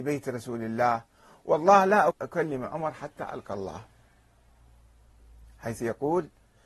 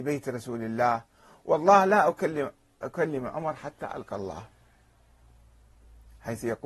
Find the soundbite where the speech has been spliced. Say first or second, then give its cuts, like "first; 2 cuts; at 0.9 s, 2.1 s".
first; 1 cut; at 2.1 s